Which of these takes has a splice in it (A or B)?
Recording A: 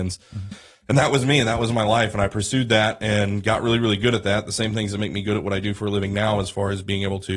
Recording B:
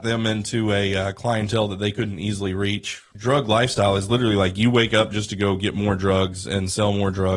B